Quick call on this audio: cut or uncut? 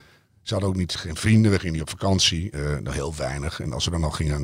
uncut